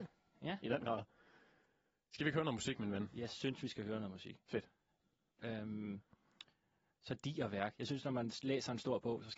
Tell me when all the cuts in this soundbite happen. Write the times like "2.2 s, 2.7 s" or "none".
5.3 s